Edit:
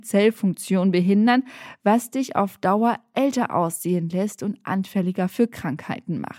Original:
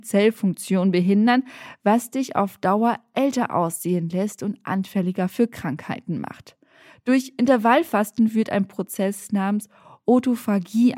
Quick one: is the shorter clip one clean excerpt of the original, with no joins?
yes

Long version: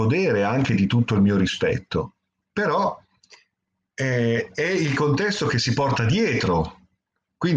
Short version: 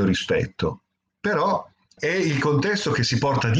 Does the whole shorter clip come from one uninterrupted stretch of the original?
no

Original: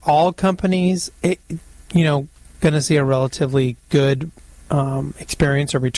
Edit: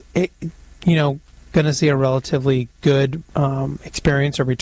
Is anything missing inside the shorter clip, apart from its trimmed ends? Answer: yes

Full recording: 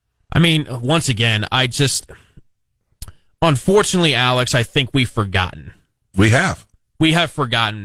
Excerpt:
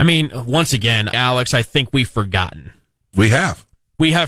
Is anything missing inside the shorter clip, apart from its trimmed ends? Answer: yes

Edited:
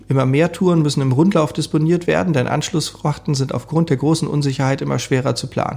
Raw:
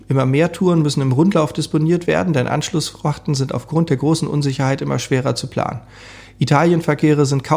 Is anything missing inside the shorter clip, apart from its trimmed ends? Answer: no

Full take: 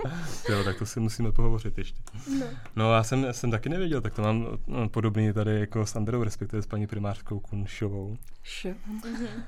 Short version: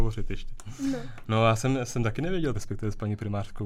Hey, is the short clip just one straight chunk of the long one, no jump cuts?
no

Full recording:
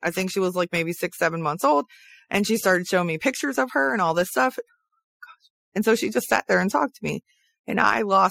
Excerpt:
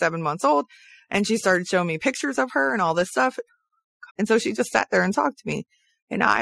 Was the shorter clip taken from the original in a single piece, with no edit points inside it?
no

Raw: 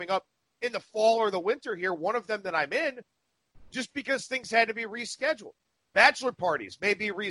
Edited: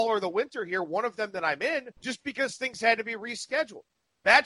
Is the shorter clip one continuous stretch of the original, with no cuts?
no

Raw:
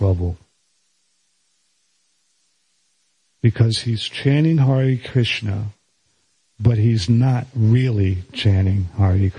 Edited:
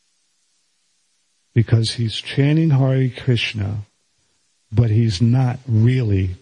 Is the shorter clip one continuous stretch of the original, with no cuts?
yes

